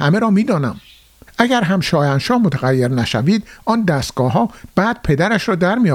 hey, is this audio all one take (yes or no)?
no